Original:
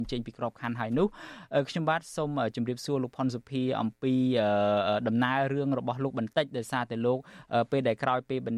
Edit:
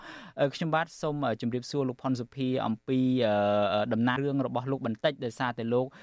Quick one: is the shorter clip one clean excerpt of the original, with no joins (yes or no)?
no